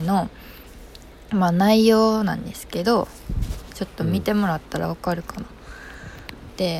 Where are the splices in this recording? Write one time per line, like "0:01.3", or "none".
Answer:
none